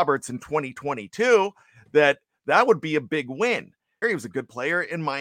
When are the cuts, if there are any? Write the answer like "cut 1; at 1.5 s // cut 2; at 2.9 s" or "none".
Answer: cut 1; at 4.0 s